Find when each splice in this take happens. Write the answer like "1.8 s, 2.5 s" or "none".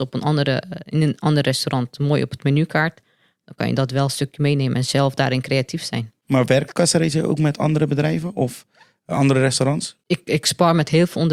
none